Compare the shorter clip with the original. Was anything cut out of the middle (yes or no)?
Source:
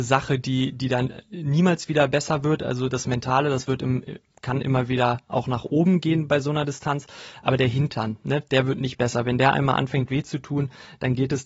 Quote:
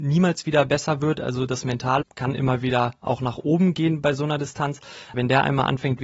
yes